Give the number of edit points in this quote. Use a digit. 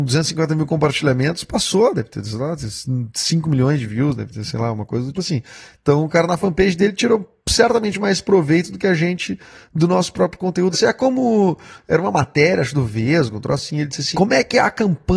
3